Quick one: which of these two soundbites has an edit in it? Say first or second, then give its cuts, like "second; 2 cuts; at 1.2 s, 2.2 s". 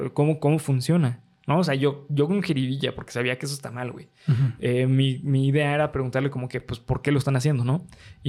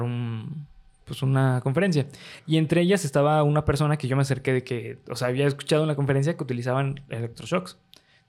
second; 1 cut; at 2.4 s